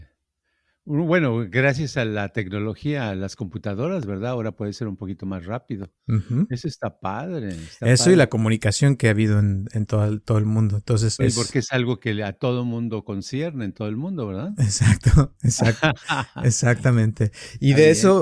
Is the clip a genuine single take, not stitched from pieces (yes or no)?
no